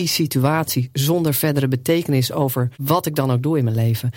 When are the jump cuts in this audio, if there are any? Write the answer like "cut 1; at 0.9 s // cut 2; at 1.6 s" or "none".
cut 1; at 2.7 s